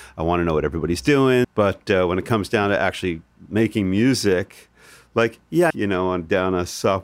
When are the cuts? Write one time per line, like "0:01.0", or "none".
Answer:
0:01.4
0:05.7

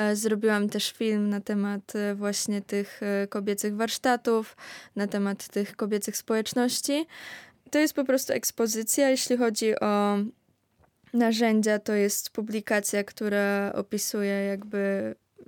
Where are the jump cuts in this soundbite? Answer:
none

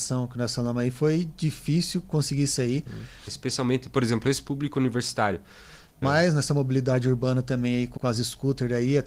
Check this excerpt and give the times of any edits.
0:03.3
0:06.0
0:08.0

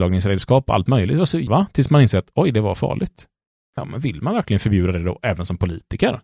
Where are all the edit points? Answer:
0:01.5
0:03.8

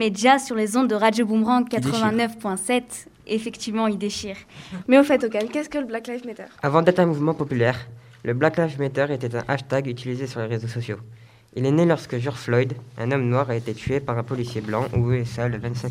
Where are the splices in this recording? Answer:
0:04.8

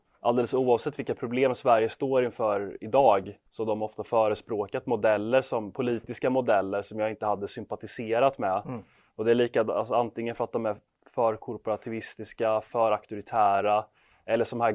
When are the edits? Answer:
0:03.5

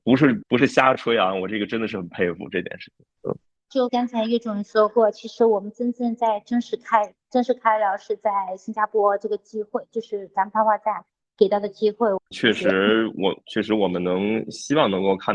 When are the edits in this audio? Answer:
0:03.9
0:12.3

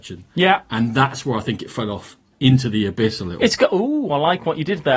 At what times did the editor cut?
none

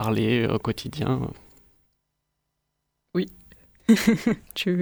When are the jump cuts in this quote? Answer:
none

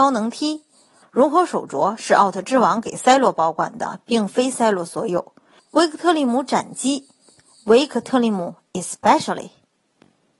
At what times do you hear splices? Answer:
0:01.0
0:05.6
0:07.5

